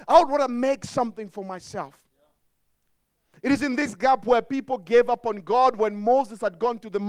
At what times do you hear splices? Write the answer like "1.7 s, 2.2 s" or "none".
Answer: none